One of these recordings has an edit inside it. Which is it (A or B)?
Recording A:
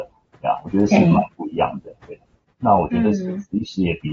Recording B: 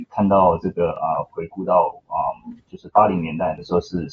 A